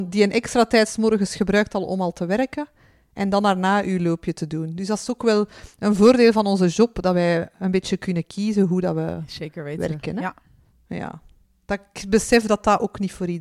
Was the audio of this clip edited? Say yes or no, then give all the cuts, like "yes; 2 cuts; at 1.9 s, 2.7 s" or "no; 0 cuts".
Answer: no; 0 cuts